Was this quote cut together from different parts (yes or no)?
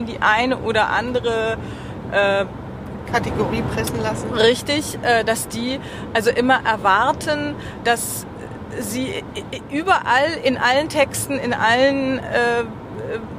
yes